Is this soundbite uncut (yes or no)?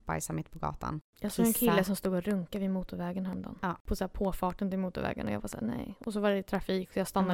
yes